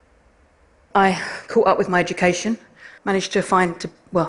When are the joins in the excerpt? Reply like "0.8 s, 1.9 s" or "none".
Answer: 0.9 s, 3.0 s